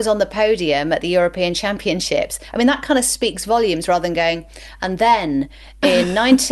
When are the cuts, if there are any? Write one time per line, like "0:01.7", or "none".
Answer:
none